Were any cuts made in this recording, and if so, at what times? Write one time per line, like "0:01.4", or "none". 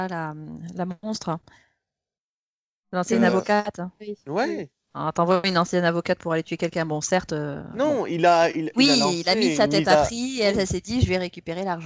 none